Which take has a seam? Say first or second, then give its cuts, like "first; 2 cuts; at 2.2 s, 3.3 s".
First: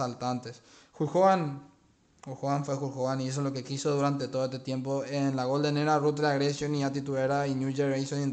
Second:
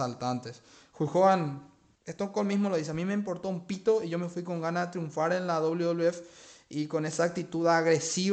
second; 1 cut; at 1.9 s